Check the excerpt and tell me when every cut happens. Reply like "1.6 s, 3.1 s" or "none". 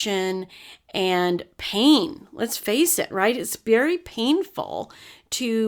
none